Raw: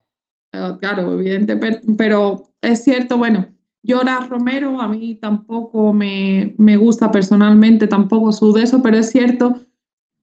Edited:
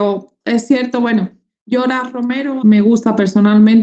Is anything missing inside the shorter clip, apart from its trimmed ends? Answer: yes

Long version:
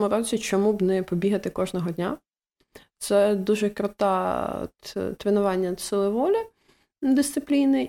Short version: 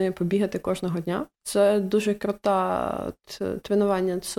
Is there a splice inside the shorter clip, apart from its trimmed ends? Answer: yes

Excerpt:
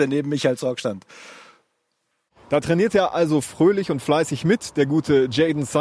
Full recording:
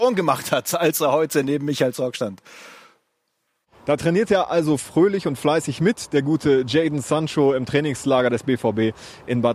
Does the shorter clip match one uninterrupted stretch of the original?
yes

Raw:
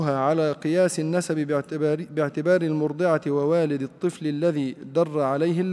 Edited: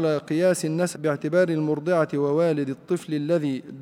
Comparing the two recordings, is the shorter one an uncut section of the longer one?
no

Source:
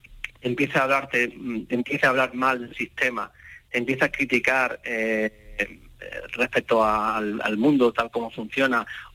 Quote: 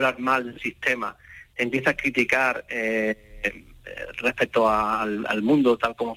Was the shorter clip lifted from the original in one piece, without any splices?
yes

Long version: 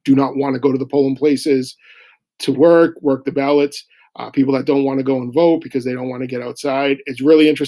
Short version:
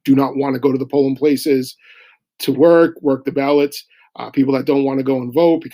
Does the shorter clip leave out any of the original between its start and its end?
no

